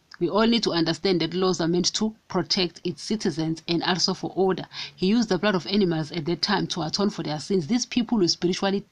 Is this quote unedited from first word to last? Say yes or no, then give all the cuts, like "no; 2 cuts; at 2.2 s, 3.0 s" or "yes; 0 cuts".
yes; 0 cuts